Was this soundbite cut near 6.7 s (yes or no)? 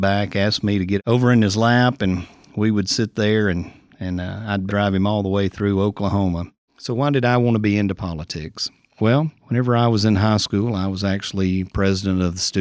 yes